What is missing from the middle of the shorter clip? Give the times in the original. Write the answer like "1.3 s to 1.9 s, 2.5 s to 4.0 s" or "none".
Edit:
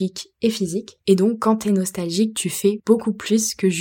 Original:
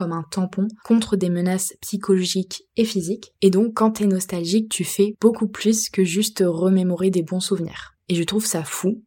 none